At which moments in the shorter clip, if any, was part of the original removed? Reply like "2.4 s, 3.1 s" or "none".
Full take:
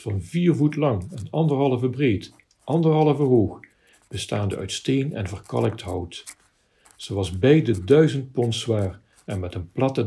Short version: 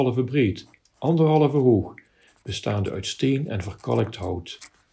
none